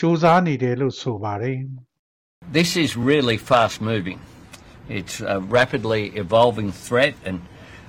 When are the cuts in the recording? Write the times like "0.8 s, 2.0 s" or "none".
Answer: none

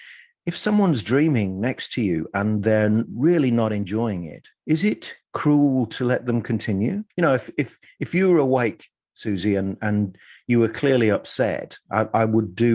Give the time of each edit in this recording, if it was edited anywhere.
7.1 s

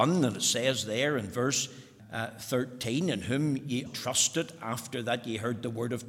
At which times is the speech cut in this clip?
2.0 s, 3.9 s

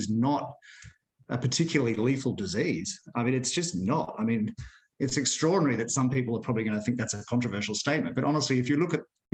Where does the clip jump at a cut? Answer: none

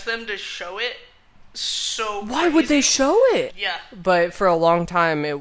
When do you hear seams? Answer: 3.5 s

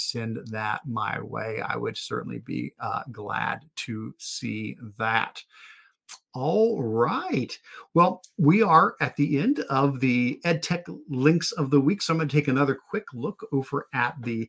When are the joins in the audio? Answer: none

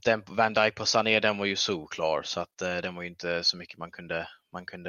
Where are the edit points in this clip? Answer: none

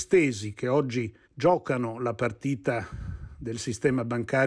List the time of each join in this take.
1.2 s

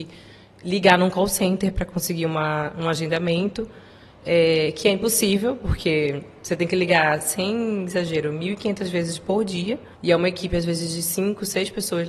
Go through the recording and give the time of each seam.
9.9 s

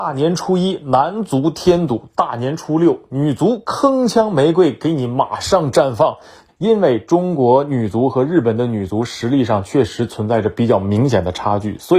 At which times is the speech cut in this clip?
6.5 s

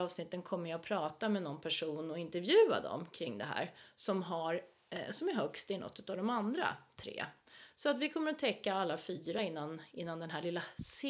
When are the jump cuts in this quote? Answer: none

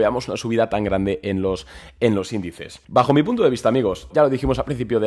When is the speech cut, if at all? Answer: 2.8 s, 4.1 s

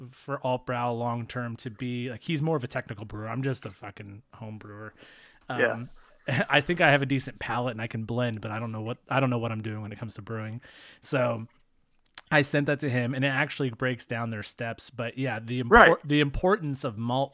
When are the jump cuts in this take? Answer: none

